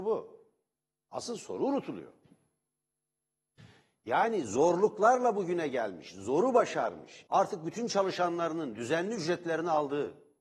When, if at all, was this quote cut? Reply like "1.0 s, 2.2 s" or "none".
7.3 s